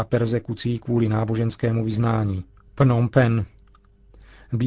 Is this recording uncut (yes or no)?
no